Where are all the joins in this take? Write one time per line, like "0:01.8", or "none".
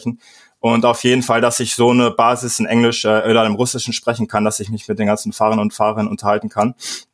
none